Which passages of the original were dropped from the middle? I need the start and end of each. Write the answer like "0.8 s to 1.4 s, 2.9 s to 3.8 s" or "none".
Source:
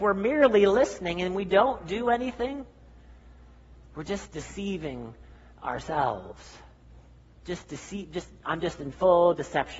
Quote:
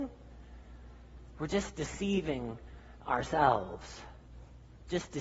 none